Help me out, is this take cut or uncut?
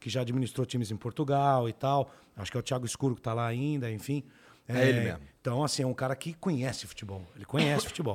uncut